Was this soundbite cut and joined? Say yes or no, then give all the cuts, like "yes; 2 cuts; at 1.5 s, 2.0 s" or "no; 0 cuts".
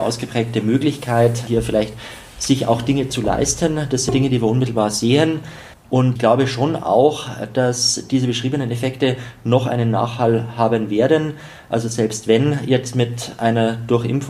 yes; 1 cut; at 5.7 s